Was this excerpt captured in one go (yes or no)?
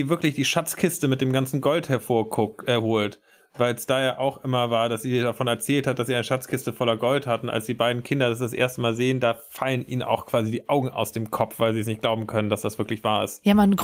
yes